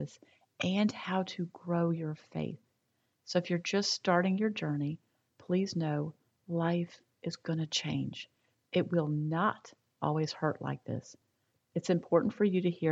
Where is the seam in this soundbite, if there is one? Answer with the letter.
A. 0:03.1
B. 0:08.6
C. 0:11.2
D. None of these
D